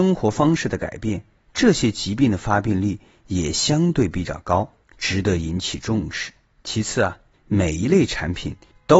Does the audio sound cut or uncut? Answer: uncut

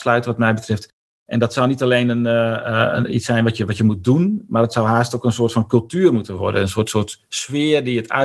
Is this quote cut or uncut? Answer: cut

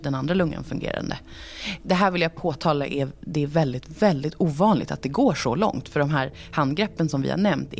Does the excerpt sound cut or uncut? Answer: uncut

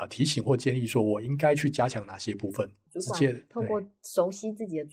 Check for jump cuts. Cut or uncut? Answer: cut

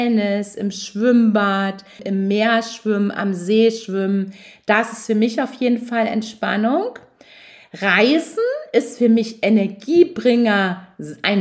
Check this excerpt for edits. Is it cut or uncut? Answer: cut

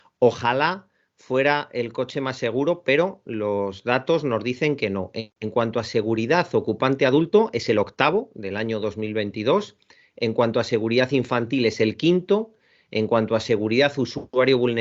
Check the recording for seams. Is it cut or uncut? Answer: uncut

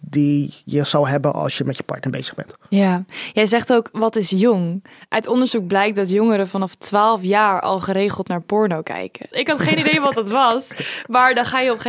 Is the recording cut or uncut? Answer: cut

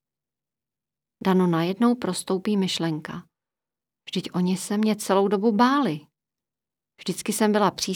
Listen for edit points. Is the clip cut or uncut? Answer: uncut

